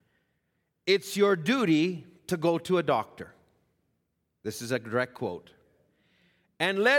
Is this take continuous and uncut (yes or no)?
yes